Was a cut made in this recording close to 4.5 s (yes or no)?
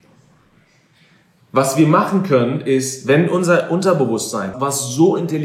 yes